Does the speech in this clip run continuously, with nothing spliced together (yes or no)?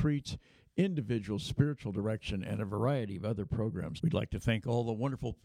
no